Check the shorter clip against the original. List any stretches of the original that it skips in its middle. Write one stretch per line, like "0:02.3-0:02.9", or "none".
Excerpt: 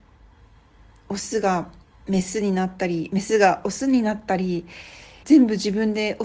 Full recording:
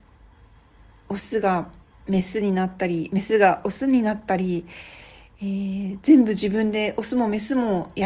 0:05.2-0:06.0